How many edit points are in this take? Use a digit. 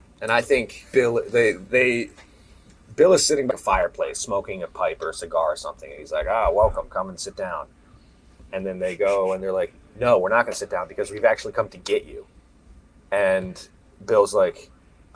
1